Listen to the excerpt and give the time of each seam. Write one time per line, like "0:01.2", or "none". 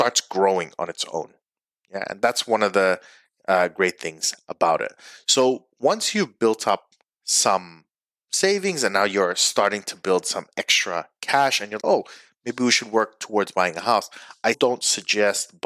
0:11.8
0:14.5